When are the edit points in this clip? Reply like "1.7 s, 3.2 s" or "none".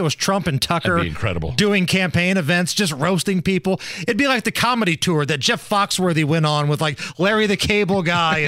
none

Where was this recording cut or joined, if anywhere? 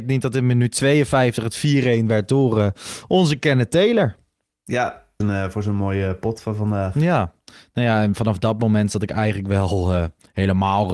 5.2 s

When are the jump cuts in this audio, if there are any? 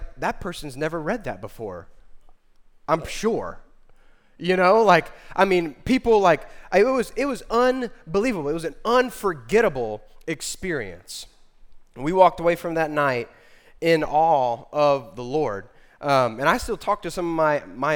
none

